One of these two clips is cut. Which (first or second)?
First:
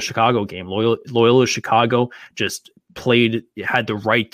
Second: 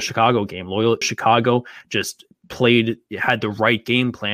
second